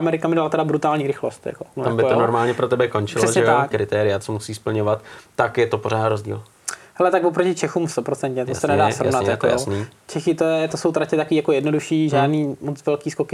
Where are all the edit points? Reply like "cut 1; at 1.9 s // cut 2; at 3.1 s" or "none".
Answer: cut 1; at 1.8 s // cut 2; at 3.7 s